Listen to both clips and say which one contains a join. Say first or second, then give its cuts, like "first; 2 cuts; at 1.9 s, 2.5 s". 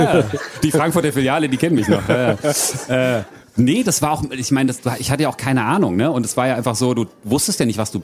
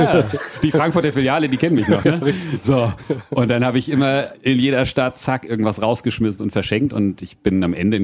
second; 1 cut; at 2.0 s